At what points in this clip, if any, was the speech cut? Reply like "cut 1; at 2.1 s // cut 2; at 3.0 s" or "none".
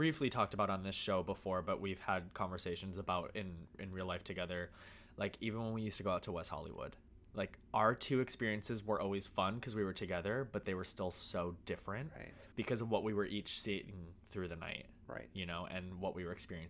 cut 1; at 12.5 s